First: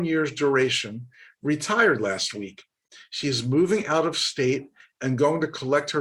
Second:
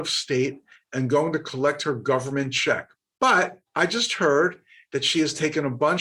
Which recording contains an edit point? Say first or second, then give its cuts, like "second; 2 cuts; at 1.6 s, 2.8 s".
second; 1 cut; at 3.7 s